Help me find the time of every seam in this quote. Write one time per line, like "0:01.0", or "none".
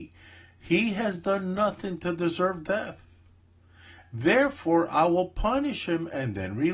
none

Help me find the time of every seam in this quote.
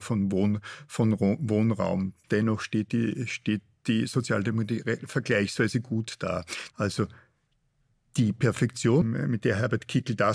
0:02.2
0:06.7
0:09.0

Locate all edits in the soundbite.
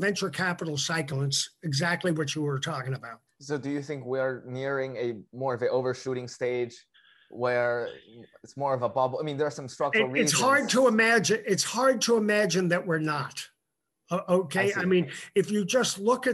none

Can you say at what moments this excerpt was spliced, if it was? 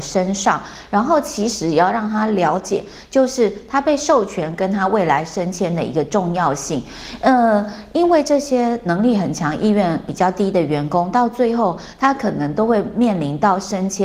none

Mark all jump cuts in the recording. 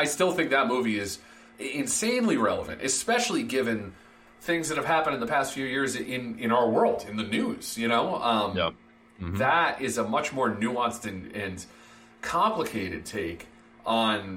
none

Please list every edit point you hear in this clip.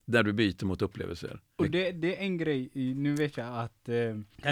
none

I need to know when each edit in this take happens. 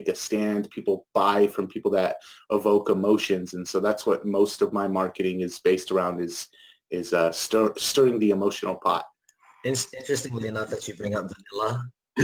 none

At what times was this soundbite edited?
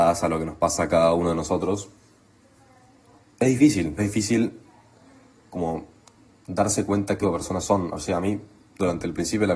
0:04.0
0:07.2

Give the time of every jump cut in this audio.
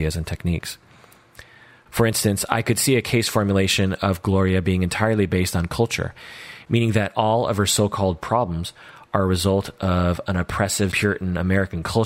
0:10.9

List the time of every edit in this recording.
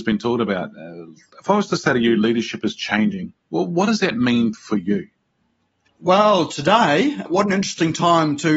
none

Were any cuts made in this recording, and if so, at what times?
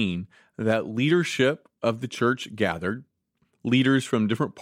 none

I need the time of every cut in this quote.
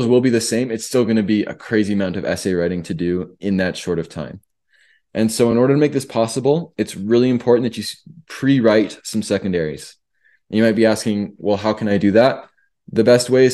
none

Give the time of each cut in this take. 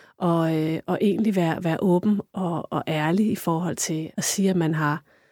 0:02.3
0:04.1

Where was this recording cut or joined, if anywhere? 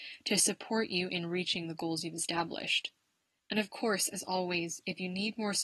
0:03.4

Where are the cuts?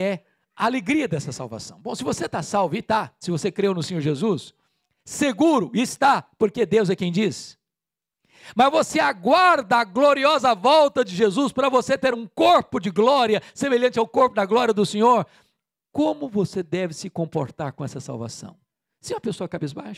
none

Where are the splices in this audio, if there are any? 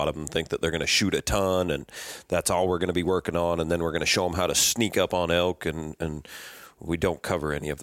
none

